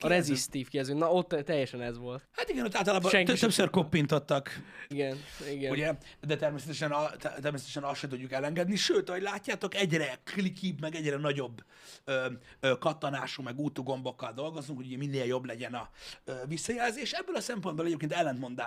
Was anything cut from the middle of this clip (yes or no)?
yes